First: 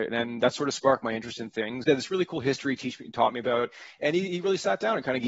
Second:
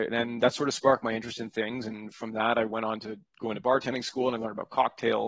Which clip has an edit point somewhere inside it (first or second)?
first